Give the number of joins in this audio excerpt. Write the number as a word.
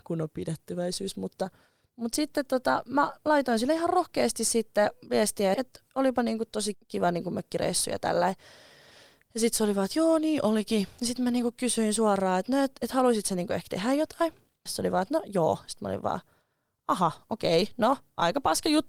three